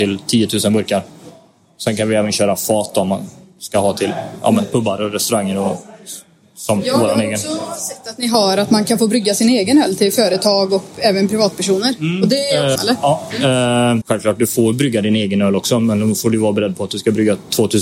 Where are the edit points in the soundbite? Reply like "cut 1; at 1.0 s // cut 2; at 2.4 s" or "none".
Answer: cut 1; at 12.7 s // cut 2; at 14.0 s